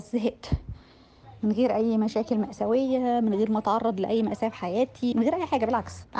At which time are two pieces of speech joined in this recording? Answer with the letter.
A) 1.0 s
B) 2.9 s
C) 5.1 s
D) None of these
C